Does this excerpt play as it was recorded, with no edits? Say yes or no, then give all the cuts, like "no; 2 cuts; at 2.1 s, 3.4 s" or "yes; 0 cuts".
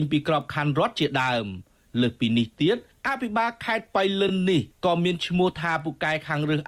yes; 0 cuts